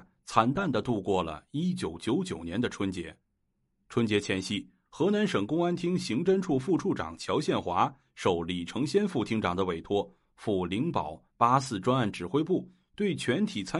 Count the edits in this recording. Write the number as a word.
zero